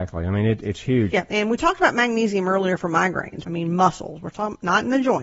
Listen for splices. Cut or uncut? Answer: cut